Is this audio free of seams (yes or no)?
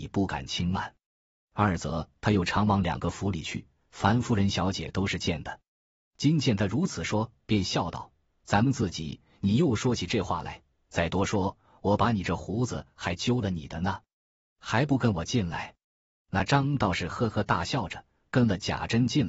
yes